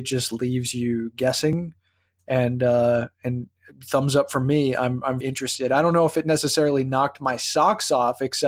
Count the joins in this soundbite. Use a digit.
1